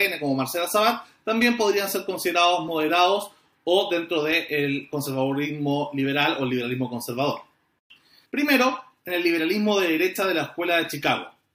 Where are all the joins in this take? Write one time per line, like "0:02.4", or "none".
0:08.2